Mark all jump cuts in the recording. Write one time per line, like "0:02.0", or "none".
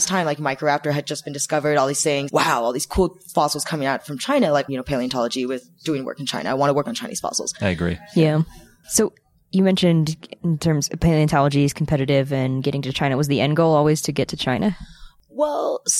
0:02.3
0:04.7
0:07.6